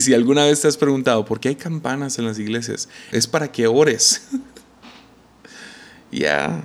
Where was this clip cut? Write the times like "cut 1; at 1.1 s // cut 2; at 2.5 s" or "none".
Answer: cut 1; at 3.1 s

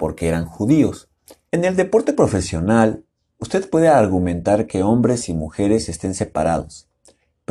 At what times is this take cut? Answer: cut 1; at 1.5 s

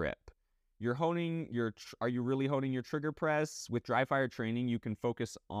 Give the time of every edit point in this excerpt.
none

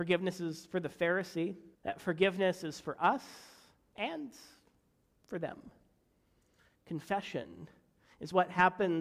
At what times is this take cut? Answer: cut 1; at 1.7 s // cut 2; at 6.8 s

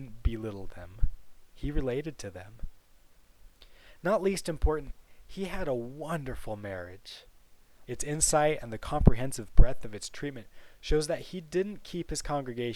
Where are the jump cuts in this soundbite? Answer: cut 1; at 7.9 s

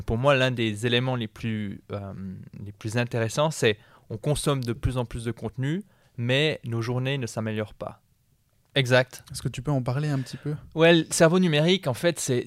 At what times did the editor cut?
cut 1; at 8.6 s

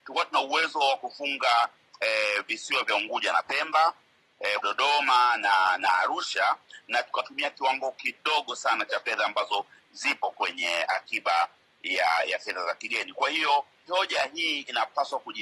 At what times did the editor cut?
cut 1; at 4.6 s // cut 2; at 13.9 s

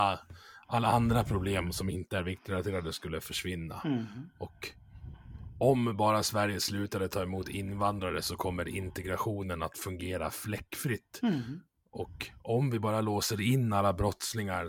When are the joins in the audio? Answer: none

